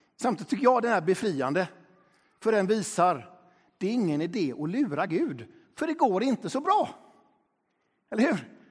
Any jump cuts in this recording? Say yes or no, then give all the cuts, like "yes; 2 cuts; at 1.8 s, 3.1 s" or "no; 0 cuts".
no; 0 cuts